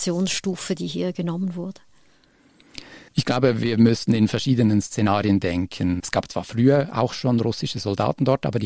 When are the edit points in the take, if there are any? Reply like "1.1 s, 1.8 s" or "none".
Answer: 3.1 s, 6.0 s